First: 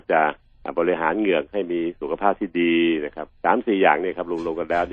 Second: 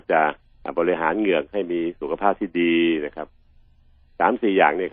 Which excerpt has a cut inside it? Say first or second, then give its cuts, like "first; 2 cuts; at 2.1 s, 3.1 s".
first; 1 cut; at 3.4 s